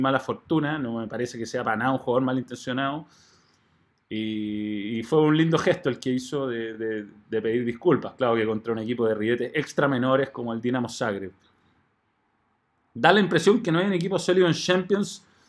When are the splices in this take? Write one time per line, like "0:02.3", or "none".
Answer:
none